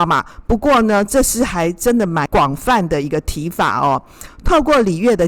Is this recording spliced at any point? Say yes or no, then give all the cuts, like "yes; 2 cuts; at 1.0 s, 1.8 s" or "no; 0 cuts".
yes; 1 cut; at 4.3 s